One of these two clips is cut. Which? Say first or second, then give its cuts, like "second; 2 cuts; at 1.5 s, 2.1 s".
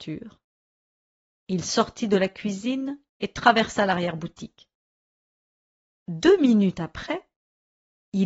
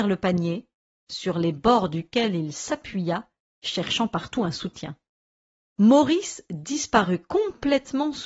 second; 1 cut; at 5.6 s